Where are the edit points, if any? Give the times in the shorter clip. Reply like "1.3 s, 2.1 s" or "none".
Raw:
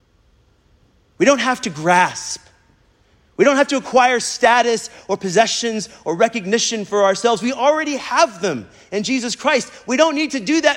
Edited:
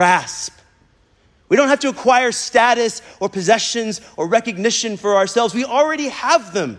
none